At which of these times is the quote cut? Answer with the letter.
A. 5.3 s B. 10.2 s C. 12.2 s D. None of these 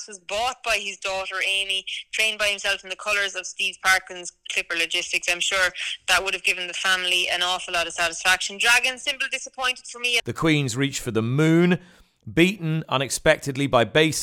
B